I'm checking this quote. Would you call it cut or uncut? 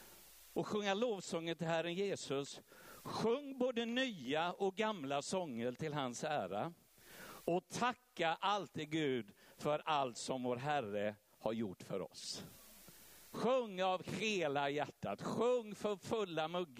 cut